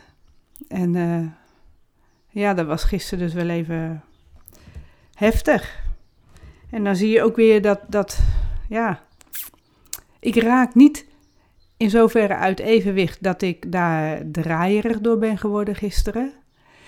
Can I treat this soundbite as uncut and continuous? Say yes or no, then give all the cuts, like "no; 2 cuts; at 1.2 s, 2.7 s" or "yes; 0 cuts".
yes; 0 cuts